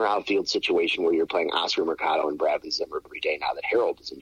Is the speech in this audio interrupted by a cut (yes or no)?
yes